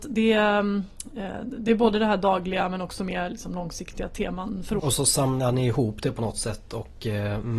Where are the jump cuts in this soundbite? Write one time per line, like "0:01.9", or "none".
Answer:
0:04.8